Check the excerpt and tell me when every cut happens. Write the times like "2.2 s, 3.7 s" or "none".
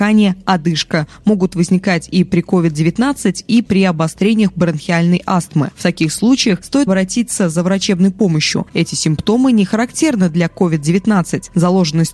6.9 s, 8.7 s